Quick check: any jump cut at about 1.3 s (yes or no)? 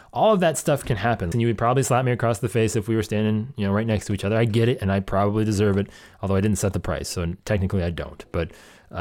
yes